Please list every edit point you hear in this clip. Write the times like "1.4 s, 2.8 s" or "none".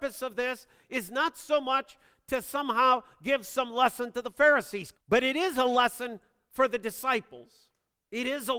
4.9 s

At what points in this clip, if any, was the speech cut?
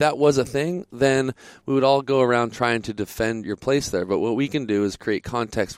3.4 s

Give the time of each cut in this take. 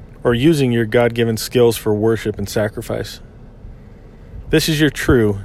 4.5 s

